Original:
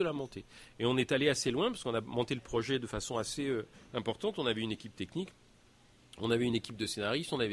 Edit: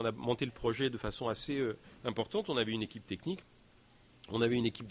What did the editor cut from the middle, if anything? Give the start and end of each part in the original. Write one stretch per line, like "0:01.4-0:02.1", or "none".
none